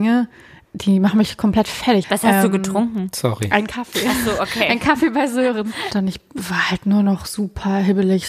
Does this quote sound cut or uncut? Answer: cut